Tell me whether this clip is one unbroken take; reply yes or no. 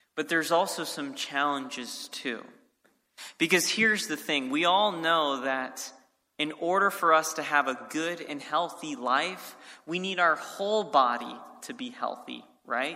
yes